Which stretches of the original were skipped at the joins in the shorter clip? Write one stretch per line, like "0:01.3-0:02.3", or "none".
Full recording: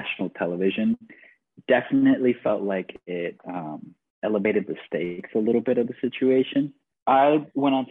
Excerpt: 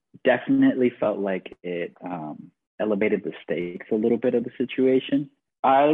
none